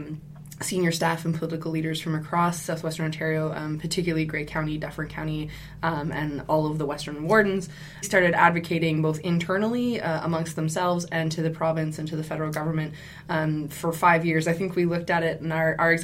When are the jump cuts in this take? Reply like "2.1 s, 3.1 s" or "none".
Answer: 8.0 s